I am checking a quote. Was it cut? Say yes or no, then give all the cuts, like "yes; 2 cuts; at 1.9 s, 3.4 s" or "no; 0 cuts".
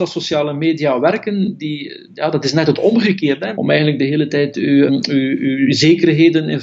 yes; 2 cuts; at 3.5 s, 4.9 s